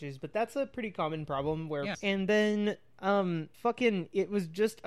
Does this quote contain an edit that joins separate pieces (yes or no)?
yes